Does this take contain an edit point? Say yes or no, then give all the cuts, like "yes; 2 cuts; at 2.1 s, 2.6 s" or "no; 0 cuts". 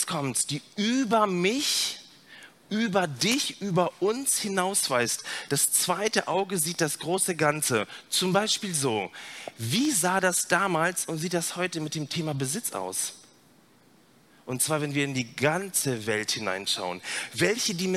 no; 0 cuts